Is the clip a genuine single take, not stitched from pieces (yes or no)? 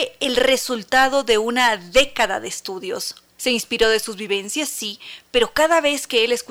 no